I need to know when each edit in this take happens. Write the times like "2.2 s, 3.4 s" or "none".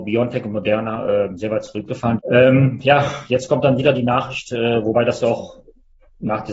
2.2 s